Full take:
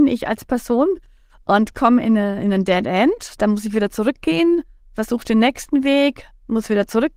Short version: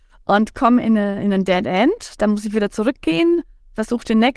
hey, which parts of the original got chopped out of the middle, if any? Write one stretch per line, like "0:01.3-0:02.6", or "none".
none